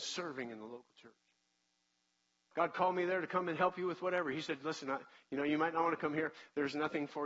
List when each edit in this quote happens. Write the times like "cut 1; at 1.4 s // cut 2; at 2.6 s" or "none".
cut 1; at 2.5 s